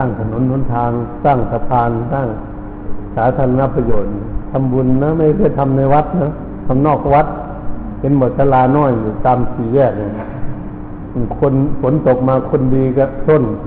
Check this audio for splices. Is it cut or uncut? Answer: cut